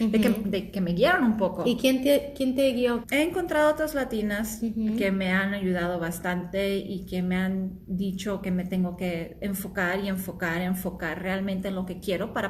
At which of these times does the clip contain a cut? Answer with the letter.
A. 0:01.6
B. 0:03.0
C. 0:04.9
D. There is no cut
B